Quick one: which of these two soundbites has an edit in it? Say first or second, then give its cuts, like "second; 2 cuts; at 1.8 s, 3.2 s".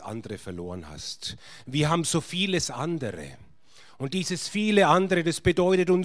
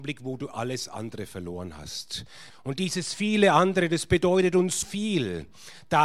second; 2 cuts; at 2.5 s, 4.8 s